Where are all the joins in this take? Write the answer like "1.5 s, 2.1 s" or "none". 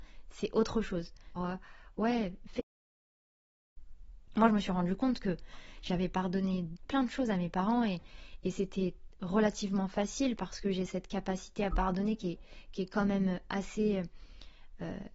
1.4 s, 4.3 s